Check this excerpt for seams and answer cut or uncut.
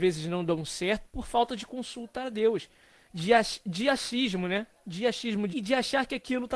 cut